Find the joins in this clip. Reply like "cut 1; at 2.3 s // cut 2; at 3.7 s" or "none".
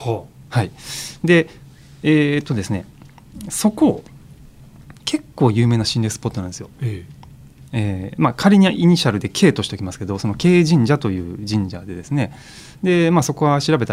none

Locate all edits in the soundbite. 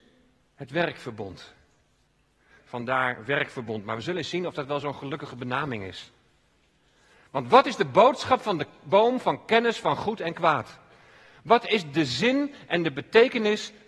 cut 1; at 2.6 s

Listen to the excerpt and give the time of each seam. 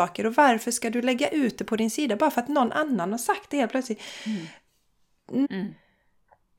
cut 1; at 5.4 s

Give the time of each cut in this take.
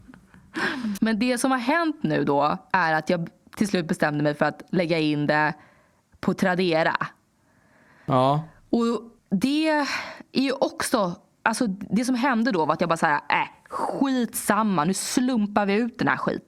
cut 1; at 1.0 s // cut 2; at 9.2 s

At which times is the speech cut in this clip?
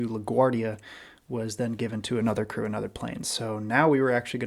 none

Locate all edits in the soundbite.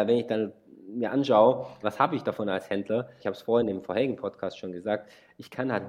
cut 1; at 1.8 s // cut 2; at 3.2 s

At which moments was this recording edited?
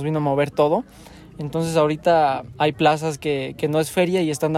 none

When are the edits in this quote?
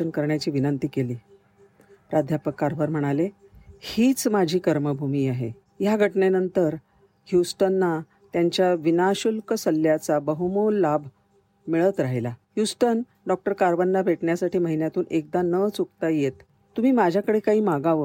none

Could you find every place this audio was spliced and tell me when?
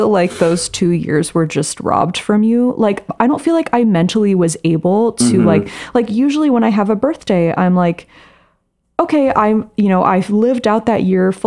cut 1; at 3.2 s

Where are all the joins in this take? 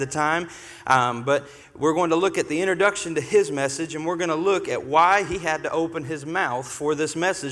none

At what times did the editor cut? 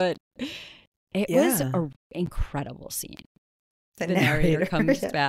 cut 1; at 1.9 s // cut 2; at 3.9 s

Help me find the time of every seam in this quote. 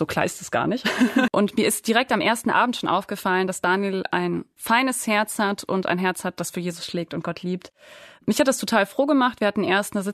cut 1; at 1.3 s

